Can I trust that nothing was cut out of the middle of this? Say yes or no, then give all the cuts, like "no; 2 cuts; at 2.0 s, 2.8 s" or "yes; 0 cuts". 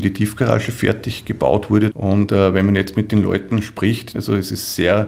no; 2 cuts; at 1.9 s, 4.1 s